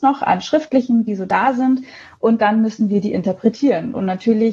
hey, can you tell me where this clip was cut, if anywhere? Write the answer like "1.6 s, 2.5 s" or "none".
1.1 s